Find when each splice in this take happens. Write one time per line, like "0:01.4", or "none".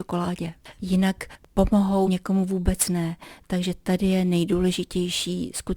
0:02.1